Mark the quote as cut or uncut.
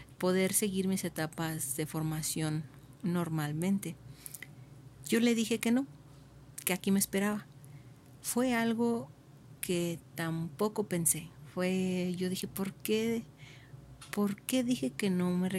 uncut